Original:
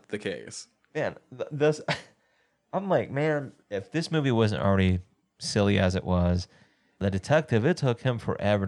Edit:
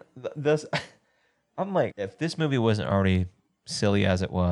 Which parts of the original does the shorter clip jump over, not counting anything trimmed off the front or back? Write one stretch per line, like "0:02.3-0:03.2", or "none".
0:03.1-0:03.6